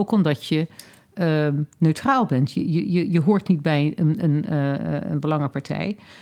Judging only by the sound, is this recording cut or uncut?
uncut